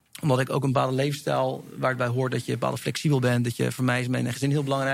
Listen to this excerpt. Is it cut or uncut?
uncut